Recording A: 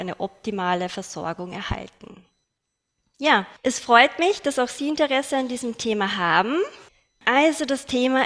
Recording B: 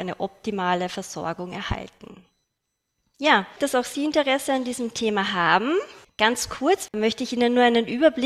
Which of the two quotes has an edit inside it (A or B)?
B